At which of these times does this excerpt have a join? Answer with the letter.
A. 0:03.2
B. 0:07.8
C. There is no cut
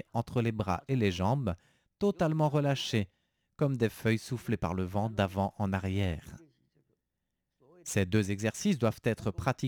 C